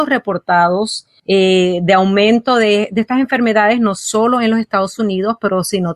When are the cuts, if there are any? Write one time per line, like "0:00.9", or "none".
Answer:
none